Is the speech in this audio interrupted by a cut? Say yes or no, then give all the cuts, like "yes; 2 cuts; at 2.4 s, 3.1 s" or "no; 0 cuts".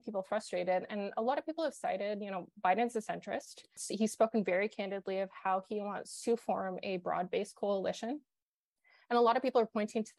no; 0 cuts